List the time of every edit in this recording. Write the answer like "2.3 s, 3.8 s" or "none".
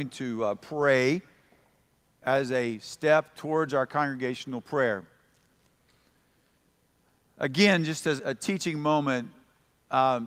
8.2 s